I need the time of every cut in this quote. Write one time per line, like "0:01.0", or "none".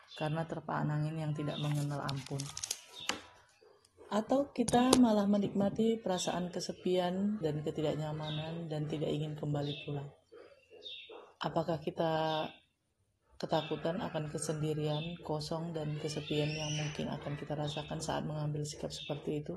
0:07.4